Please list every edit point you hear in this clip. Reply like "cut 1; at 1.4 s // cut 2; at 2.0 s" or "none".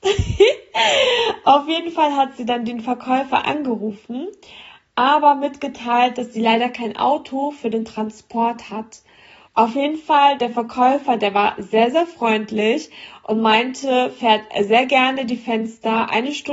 cut 1; at 9.5 s

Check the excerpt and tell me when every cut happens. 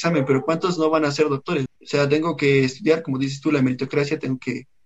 cut 1; at 1.7 s

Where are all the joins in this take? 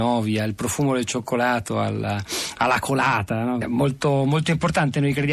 cut 1; at 3.6 s

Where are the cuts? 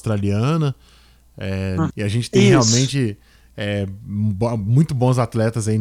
cut 1; at 1.9 s

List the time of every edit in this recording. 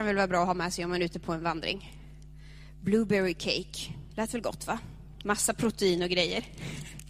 cut 1; at 4.1 s

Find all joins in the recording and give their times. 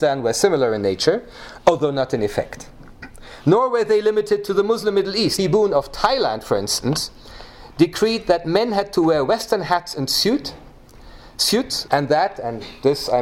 cut 1; at 5.4 s // cut 2; at 11.9 s

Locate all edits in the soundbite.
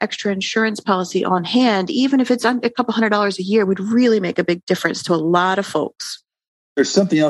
none

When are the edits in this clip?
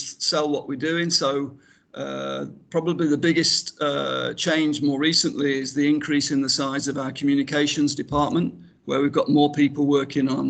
none

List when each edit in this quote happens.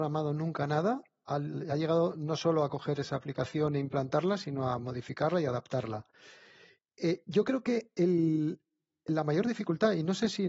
none

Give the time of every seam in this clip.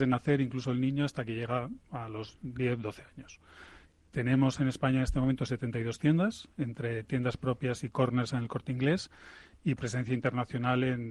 none

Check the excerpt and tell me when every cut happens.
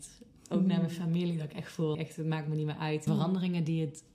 cut 1; at 1.9 s // cut 2; at 3.1 s

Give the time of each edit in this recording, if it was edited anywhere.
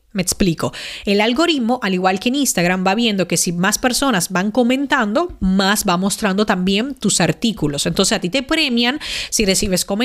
none

